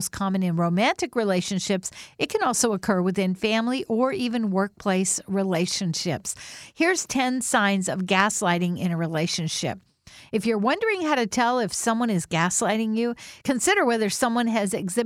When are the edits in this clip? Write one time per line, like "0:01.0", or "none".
none